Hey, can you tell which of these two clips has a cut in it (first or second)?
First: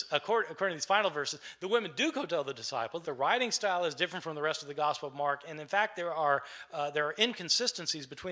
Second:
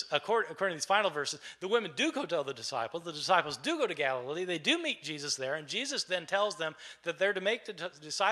first